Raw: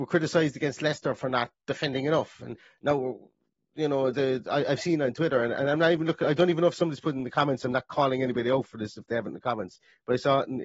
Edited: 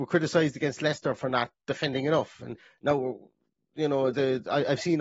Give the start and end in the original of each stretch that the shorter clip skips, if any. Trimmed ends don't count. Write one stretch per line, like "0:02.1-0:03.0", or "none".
none